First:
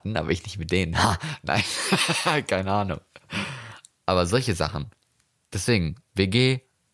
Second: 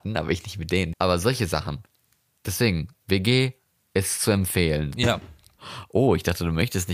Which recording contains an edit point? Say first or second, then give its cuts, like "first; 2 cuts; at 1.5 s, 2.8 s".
second; 2 cuts; at 0.9 s, 4.9 s